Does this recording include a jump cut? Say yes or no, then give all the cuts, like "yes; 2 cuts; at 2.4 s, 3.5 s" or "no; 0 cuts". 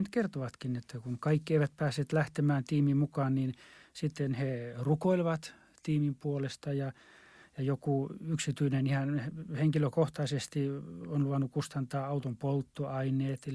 no; 0 cuts